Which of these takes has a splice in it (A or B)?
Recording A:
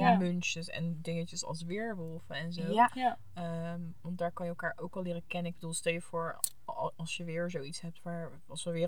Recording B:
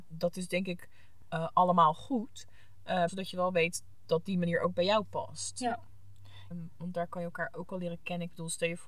B